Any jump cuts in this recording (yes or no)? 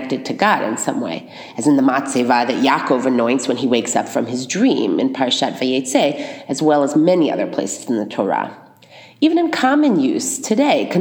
no